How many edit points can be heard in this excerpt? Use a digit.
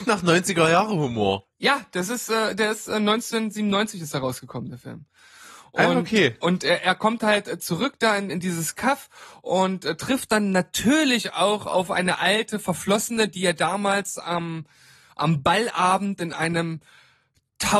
1